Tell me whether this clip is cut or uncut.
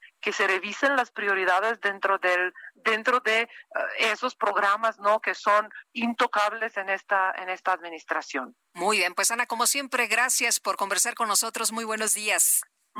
cut